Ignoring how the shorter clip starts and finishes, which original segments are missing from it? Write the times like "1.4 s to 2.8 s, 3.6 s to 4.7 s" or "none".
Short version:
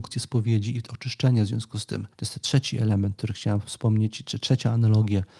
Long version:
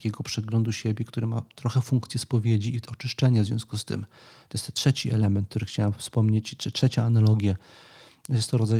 4.1 s to 4.5 s

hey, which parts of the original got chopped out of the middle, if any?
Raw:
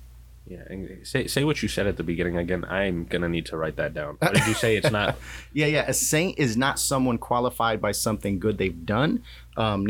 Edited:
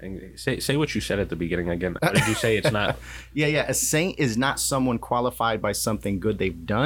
2.7 s to 4.2 s

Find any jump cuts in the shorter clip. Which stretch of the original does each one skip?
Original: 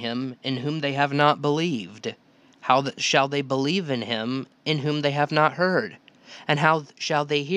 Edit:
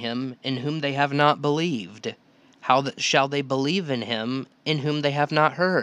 none

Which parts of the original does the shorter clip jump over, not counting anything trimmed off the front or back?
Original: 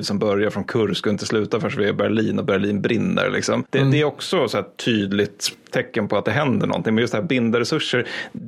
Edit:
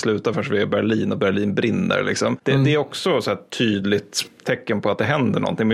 none

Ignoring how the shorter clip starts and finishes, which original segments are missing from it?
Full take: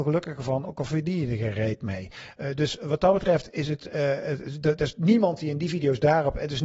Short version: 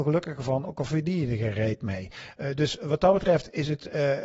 none

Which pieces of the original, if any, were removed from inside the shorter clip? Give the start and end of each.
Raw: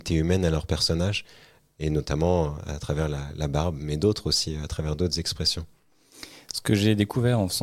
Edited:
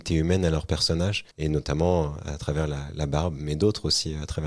1.3 s to 1.7 s

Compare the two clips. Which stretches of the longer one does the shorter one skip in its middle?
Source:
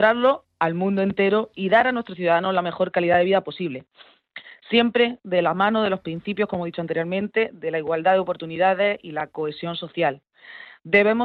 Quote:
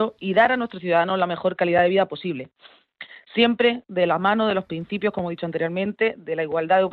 none

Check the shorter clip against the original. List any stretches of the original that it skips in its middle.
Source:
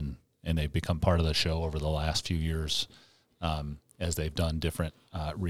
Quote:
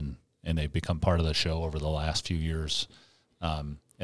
none

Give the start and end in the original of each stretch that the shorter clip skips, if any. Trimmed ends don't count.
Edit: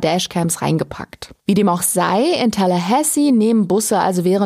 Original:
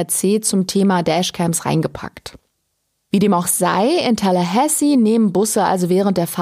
2.4 s to 3.0 s

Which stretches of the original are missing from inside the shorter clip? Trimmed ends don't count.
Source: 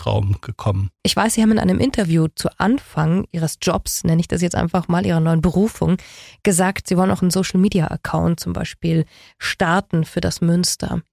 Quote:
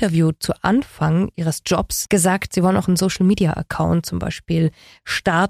4.0 s to 6.4 s

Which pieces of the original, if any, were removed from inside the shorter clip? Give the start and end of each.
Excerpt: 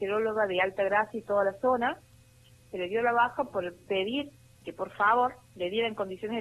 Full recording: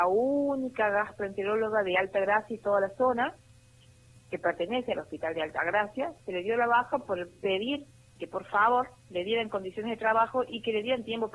4.1 s to 6.2 s

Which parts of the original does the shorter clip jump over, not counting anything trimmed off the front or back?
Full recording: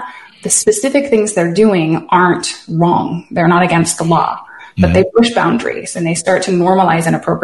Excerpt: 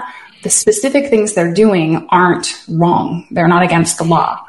none

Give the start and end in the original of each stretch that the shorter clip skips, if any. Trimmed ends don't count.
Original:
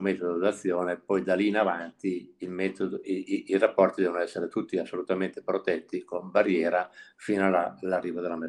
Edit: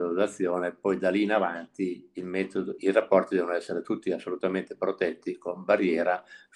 3.0 s to 3.4 s

